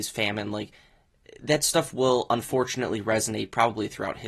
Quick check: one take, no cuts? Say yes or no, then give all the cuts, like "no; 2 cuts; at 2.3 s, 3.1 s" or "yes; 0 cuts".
yes; 0 cuts